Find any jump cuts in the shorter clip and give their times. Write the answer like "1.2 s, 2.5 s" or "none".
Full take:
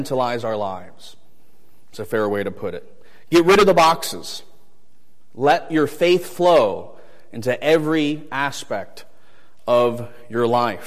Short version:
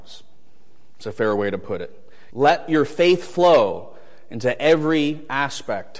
2.3 s